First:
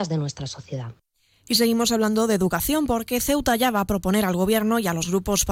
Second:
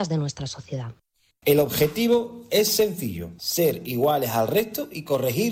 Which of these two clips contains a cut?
second; 1 cut; at 1.3 s

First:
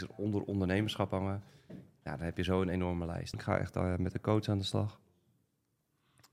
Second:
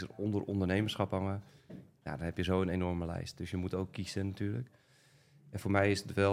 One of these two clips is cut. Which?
first; 1 cut; at 3.3 s

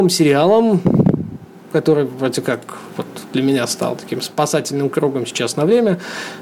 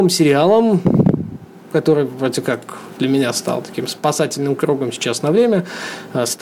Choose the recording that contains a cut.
second; 1 cut; at 2.9 s

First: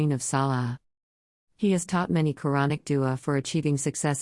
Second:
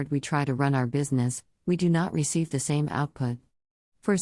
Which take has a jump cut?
first; 1 cut; at 1.4 s

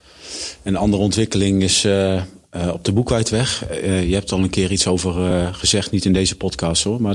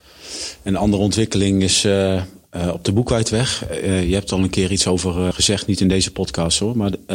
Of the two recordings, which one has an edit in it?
second; 1 cut; at 5.3 s

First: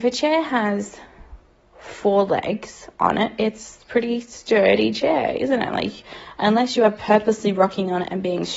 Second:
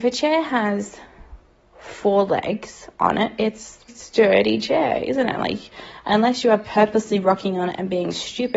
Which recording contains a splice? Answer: second; 1 cut; at 3.9 s

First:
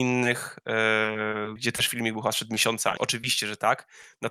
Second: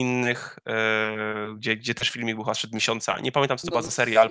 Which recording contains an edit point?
first; 2 cuts; at 1.6 s, 3.0 s

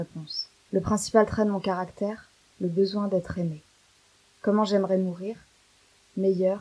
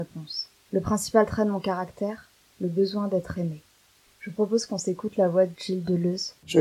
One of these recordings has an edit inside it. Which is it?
second; 1 cut; at 4.0 s

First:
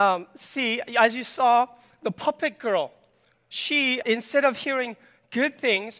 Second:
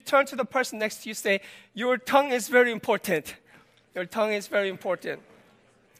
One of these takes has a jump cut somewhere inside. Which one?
first; 1 cut; at 4.0 s

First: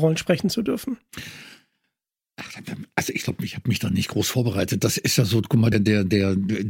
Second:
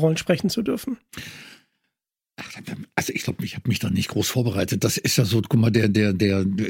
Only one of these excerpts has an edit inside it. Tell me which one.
first; 1 cut; at 5.7 s

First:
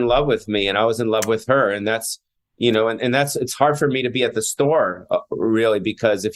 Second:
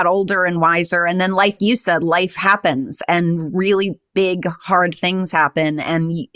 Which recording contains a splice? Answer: second; 1 cut; at 1.6 s

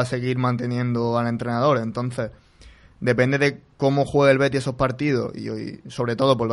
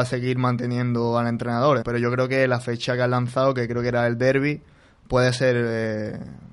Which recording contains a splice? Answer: second; 1 cut; at 1.8 s

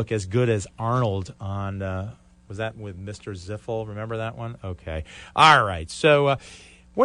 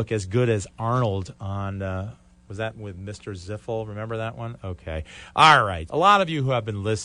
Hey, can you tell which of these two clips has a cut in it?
second; 1 cut; at 5.9 s

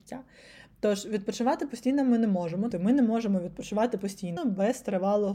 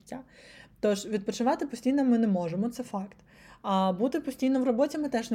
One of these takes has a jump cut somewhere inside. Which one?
first; 2 cuts; at 2.7 s, 4.4 s

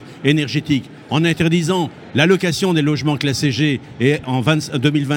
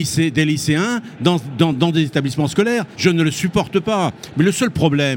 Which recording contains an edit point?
second; 2 cuts; at 1.7 s, 3.0 s

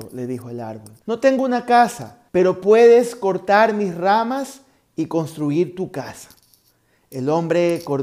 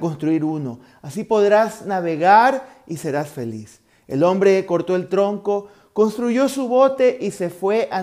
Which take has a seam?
first; 2 cuts; at 1.0 s, 2.3 s

